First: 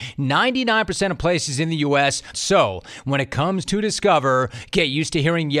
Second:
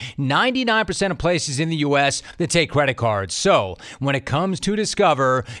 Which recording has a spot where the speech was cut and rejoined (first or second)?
first